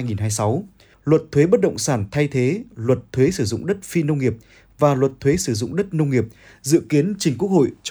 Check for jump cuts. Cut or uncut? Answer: cut